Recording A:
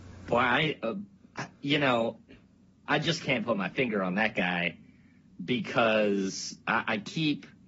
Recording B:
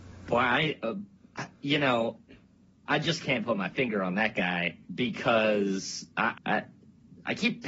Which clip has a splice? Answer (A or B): B